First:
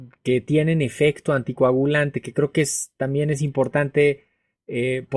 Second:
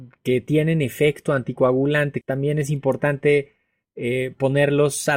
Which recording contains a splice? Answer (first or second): second